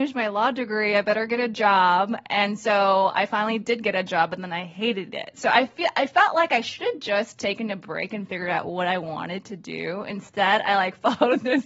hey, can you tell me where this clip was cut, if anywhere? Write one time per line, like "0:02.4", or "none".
none

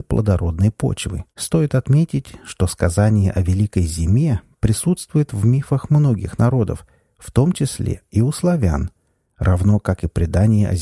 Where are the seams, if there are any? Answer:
0:01.3

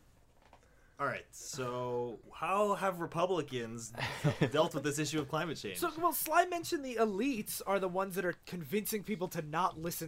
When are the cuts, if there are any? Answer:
0:02.2

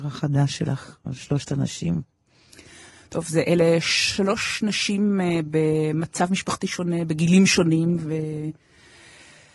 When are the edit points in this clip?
none

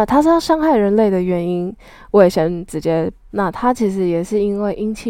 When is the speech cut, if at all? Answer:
0:03.3

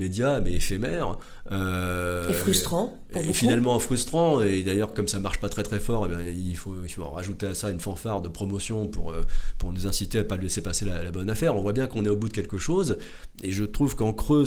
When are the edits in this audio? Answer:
none

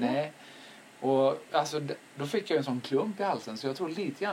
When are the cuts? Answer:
0:01.5

